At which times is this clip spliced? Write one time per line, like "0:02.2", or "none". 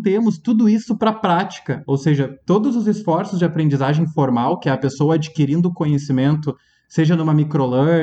none